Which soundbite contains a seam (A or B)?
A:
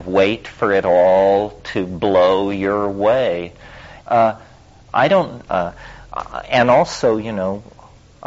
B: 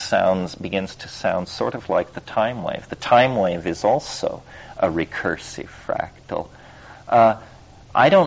A